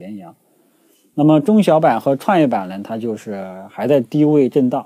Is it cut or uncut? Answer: uncut